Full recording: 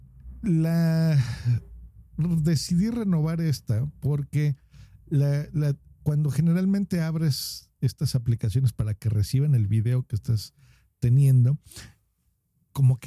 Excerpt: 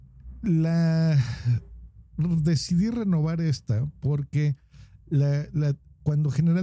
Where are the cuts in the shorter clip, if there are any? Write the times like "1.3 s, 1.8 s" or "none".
none